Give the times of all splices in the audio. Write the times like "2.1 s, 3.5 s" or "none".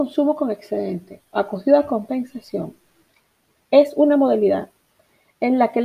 none